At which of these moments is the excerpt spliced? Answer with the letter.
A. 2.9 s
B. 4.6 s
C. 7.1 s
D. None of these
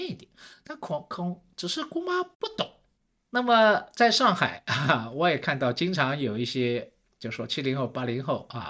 D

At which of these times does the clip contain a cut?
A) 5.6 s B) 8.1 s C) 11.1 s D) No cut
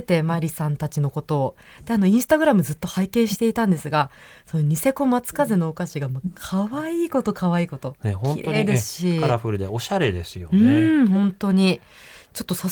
D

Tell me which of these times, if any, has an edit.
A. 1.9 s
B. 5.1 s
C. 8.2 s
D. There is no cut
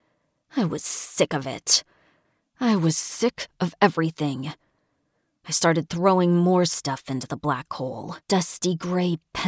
C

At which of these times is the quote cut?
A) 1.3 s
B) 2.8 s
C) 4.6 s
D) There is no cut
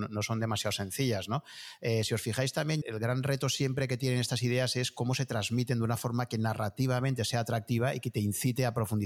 B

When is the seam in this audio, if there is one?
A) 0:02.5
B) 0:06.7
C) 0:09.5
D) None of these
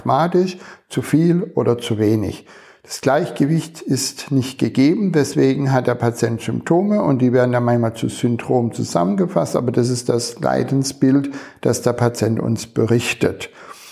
D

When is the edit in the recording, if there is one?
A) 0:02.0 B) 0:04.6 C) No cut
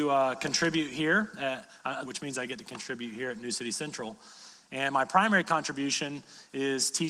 A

